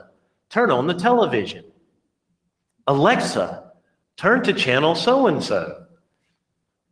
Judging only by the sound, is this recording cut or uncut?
uncut